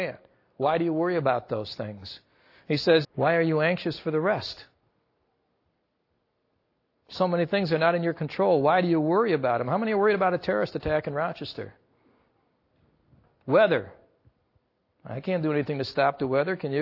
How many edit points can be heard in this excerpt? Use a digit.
1